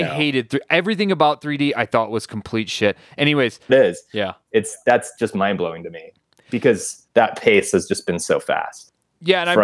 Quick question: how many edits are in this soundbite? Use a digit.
2